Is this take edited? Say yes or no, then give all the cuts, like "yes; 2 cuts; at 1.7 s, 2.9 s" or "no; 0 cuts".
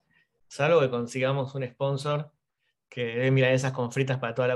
no; 0 cuts